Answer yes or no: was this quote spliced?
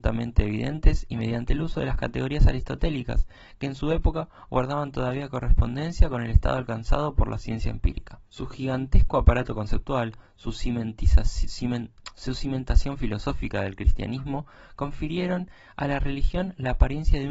yes